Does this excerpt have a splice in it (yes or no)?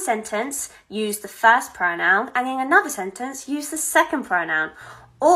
no